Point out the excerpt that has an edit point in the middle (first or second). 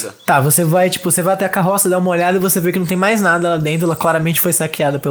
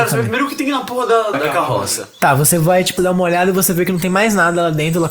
second